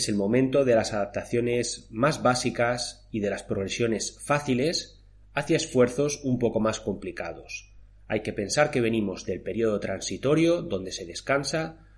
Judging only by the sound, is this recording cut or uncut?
uncut